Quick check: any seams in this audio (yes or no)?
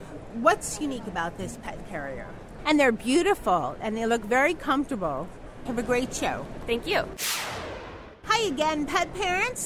yes